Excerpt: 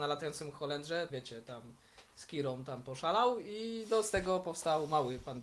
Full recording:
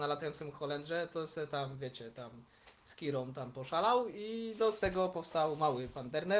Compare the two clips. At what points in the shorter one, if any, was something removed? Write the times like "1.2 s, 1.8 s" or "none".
1.1 s